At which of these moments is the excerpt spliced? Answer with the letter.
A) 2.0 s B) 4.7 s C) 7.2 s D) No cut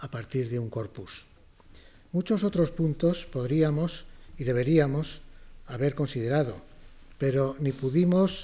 D